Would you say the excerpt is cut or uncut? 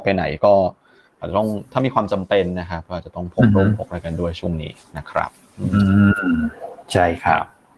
uncut